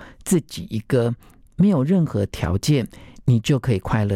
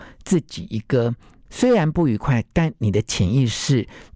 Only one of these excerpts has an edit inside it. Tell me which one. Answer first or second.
second